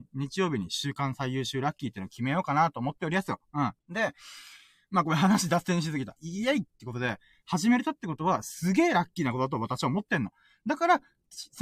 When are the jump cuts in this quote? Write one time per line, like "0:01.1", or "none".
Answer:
0:03.8
0:06.2

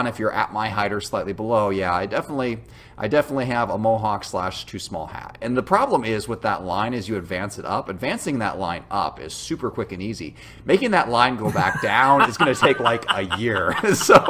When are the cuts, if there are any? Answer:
none

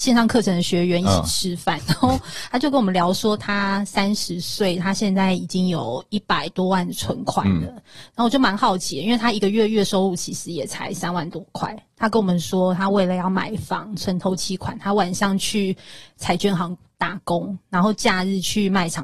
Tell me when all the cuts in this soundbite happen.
0:01.8

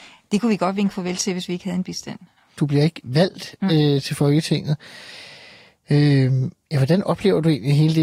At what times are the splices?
0:02.6

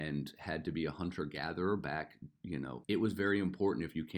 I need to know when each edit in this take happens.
0:02.8

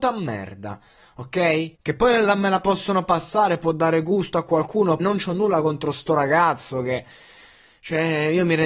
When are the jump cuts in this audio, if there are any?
0:01.7
0:05.0

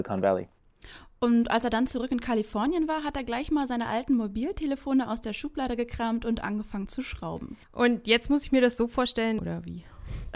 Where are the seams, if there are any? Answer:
0:07.6
0:09.4

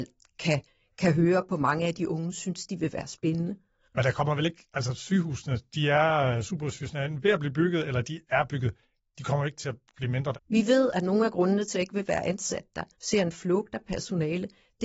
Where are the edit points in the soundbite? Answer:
0:10.3
0:11.7
0:12.9

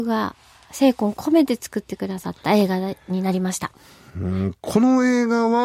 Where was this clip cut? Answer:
none

